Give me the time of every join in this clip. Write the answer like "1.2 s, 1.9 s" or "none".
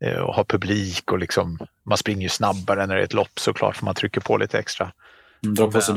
none